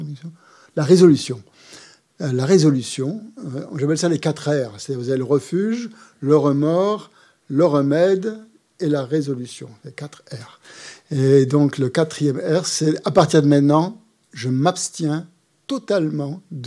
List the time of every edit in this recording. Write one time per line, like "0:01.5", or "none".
none

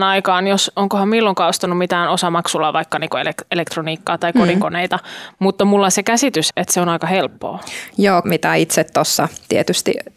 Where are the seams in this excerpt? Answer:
0:06.5
0:08.2

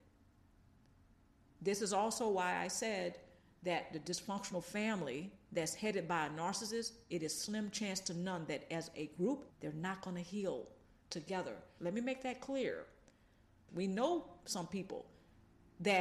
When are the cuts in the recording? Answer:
0:09.5
0:11.8
0:13.7

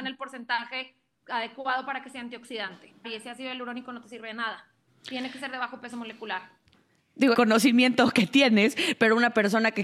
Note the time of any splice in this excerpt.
0:03.0
0:07.3

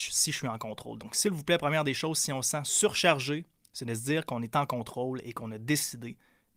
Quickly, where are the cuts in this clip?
none

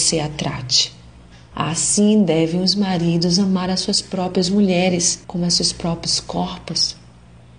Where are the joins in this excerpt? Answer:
0:01.5
0:05.2

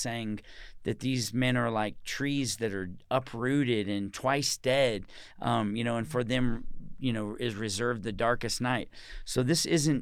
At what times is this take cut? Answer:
none

